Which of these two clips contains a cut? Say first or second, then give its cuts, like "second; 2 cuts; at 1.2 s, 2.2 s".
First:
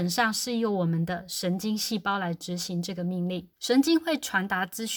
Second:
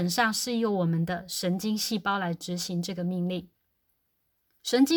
first; 1 cut; at 3.5 s